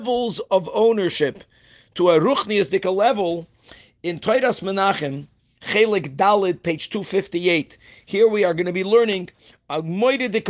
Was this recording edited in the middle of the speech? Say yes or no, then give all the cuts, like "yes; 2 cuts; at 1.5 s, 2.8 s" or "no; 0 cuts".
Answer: no; 0 cuts